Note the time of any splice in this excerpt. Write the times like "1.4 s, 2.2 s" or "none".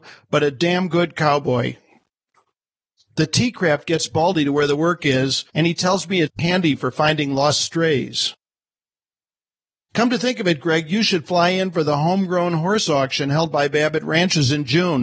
none